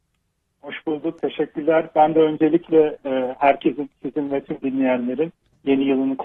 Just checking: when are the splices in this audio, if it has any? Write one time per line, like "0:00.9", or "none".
none